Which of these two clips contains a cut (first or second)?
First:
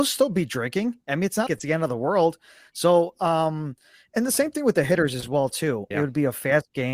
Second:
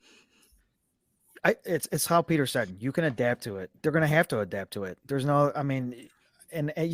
first